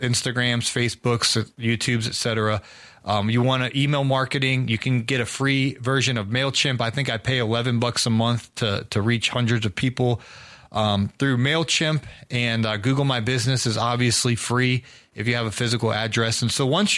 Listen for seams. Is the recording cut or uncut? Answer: uncut